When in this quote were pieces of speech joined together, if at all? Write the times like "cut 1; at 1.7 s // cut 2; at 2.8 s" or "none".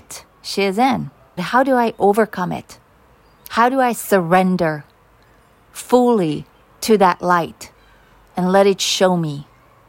cut 1; at 1.4 s